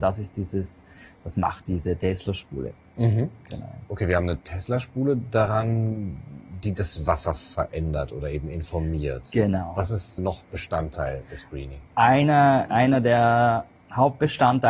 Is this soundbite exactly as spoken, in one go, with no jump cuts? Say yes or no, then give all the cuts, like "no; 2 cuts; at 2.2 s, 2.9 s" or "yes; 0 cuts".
no; 1 cut; at 10.2 s